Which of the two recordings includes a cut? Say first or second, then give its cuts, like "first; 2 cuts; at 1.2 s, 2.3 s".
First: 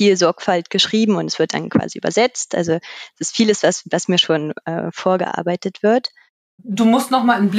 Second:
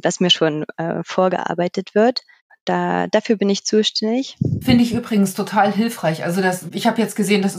second; 1 cut; at 2.5 s